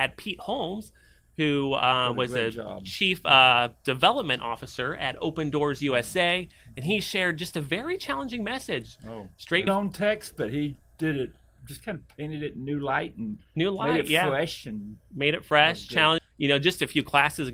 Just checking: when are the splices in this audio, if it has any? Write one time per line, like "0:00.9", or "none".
0:09.7
0:16.2